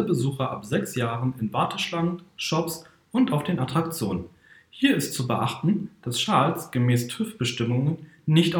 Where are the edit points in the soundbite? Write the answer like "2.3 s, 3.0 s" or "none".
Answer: 2.3 s